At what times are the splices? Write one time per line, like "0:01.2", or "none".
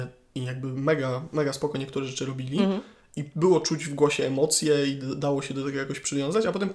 none